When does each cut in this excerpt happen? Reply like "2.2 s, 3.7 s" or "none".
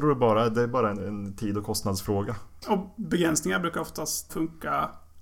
0.9 s, 2.6 s, 4.3 s